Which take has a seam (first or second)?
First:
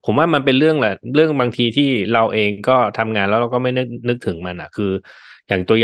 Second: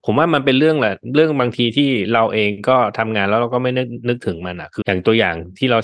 second